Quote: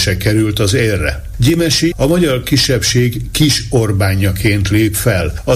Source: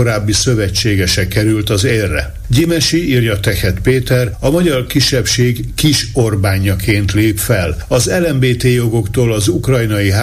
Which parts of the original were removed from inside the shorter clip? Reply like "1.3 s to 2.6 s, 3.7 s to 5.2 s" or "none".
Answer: 3.0 s to 4.4 s